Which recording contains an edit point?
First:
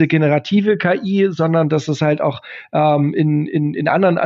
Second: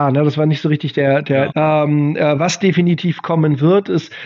second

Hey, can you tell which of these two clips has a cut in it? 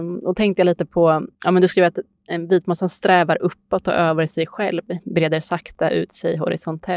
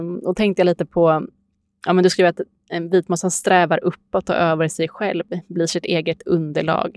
first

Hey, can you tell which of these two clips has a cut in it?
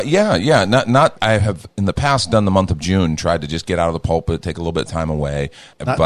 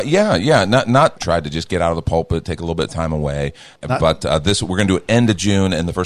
second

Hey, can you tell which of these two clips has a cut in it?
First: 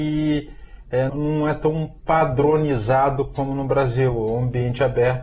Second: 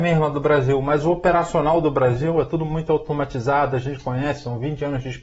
first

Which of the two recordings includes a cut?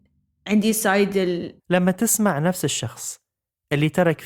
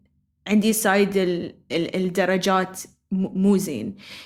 first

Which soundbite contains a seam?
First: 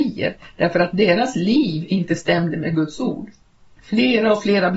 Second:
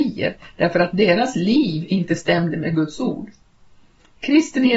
first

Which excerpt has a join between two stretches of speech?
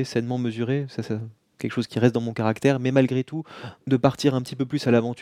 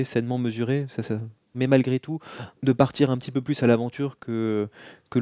second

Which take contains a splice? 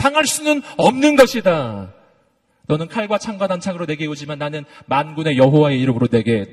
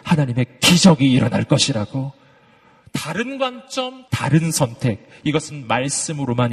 second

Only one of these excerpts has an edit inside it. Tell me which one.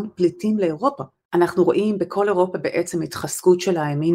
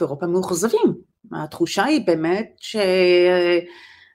first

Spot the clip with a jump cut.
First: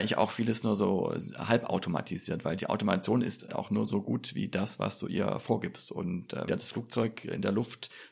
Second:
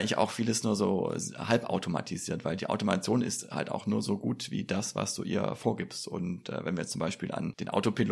first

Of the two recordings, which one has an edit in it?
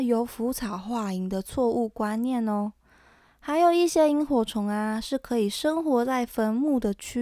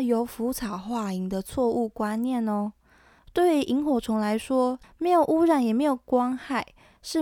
second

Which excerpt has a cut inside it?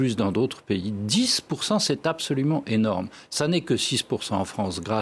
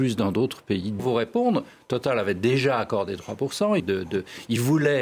second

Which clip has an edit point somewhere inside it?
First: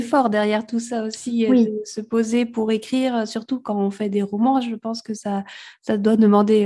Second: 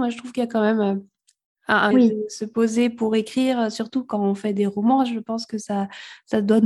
second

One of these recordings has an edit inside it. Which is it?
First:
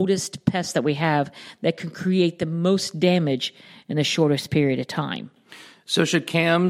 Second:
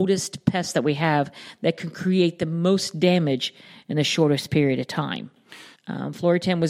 second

